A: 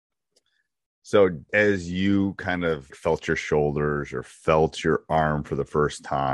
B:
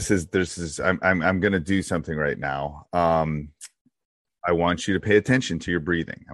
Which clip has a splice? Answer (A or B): A